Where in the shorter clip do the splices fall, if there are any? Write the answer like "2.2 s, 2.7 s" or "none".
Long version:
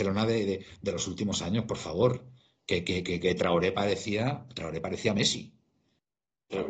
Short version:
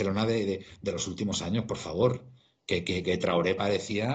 3.0 s